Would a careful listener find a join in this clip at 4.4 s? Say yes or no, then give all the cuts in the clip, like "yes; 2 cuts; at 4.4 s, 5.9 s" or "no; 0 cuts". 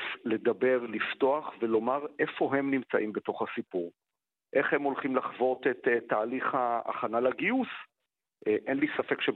no; 1 cut; at 8.3 s